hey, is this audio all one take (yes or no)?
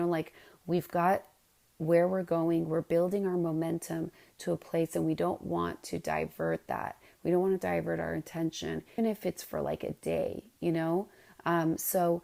no